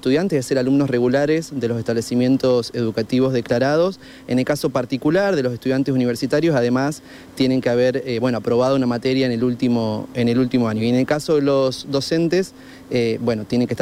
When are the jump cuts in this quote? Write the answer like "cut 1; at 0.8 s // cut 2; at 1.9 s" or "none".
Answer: none